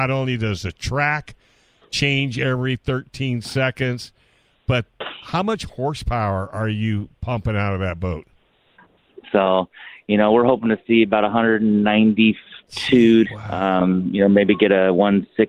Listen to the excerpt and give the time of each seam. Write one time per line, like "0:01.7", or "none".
0:09.2
0:13.2